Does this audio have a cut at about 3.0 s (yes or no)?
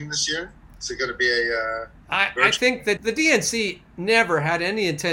yes